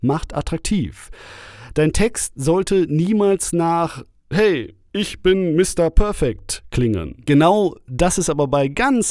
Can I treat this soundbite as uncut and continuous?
yes; 0 cuts

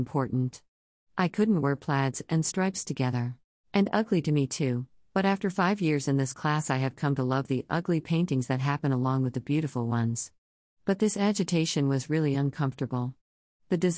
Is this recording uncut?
no; 1 cut; at 3.6 s

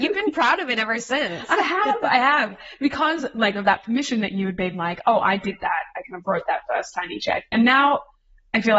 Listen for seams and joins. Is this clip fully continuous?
yes; 0 cuts

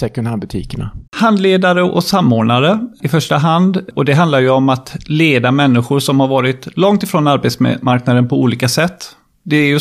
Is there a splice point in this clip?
yes; 1 cut; at 1.1 s

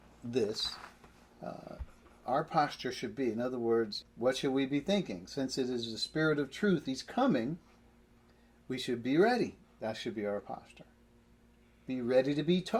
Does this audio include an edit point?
yes; 1 cut; at 4.0 s

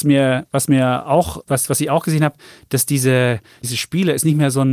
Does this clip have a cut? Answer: yes; 2 cuts; at 1.4 s, 3.6 s

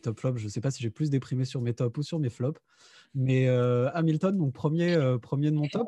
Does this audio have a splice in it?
no; 0 cuts

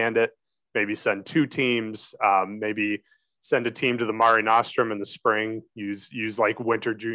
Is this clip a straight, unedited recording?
yes; 0 cuts

